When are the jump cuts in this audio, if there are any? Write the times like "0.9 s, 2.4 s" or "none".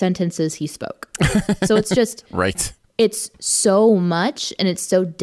none